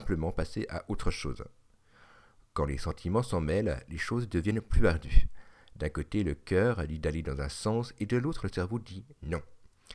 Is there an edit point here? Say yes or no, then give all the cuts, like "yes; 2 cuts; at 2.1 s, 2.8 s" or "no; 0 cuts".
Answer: no; 0 cuts